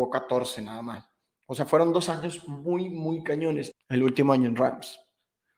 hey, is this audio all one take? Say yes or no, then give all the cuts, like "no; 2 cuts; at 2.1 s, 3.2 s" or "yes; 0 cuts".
no; 1 cut; at 3.7 s